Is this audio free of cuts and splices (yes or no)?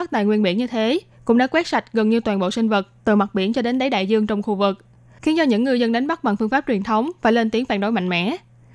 yes